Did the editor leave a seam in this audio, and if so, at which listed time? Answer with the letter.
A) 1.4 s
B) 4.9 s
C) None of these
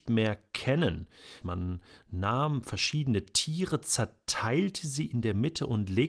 A